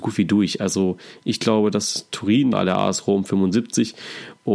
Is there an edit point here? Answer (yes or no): yes